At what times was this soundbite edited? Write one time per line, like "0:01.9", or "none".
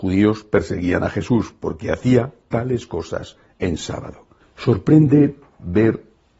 0:04.4